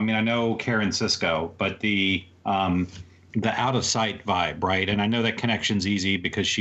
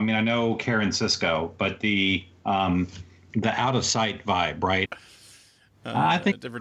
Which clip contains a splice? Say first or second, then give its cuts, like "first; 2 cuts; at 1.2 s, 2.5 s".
second; 1 cut; at 4.9 s